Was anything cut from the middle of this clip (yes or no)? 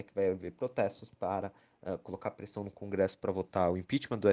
no